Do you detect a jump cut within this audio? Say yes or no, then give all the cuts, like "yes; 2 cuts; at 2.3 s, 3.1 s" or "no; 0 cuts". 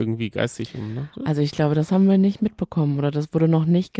no; 0 cuts